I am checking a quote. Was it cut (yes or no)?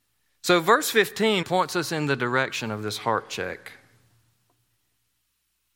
yes